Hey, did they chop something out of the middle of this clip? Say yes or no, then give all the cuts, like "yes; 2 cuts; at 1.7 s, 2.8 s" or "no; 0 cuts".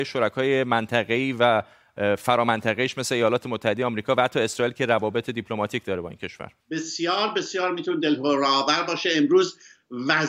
yes; 1 cut; at 6.6 s